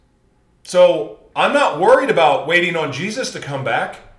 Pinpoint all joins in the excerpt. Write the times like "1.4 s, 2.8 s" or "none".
1.3 s